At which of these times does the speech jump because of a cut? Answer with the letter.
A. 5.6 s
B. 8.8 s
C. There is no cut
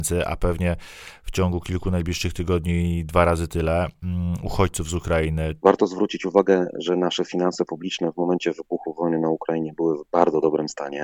A